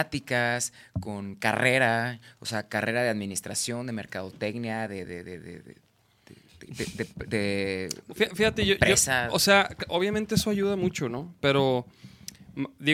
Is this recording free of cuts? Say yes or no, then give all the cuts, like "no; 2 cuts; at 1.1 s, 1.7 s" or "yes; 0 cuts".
yes; 0 cuts